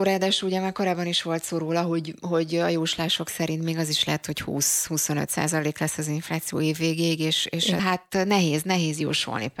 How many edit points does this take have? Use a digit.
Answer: 1